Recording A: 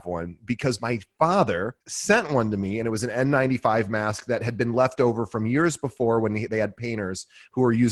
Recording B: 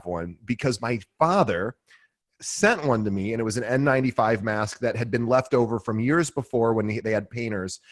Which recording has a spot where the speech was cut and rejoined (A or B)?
A